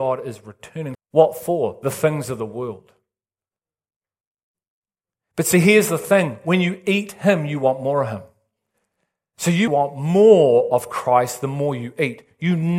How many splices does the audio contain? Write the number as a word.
two